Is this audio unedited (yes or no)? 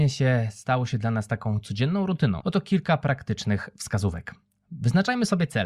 no